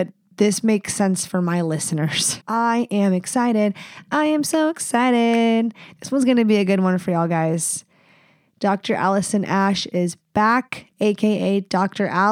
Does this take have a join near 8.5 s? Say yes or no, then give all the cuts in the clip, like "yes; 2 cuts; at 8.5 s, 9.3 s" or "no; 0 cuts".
no; 1 cut; at 2.4 s